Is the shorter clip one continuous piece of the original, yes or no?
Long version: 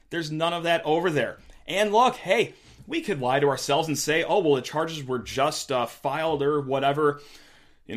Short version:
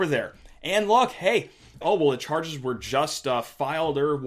no